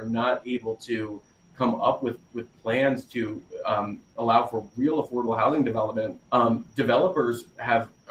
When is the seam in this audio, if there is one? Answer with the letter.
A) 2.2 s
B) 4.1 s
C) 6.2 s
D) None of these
C